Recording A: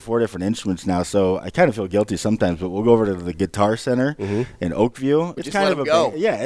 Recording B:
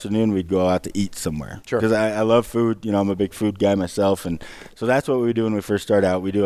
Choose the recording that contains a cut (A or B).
A